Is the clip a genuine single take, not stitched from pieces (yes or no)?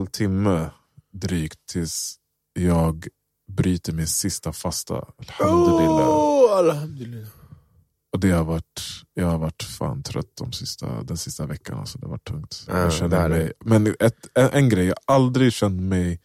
yes